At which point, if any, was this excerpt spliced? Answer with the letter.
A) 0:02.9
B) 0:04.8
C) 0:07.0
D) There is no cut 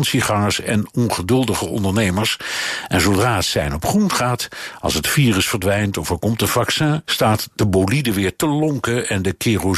C